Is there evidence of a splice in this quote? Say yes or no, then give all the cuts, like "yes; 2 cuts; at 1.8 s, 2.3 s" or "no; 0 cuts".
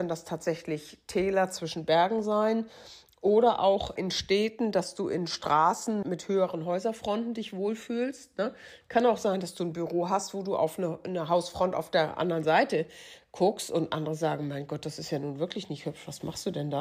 yes; 1 cut; at 6.0 s